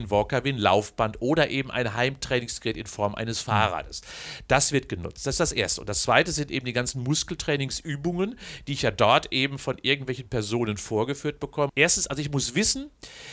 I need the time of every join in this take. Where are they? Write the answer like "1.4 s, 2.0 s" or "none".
11.7 s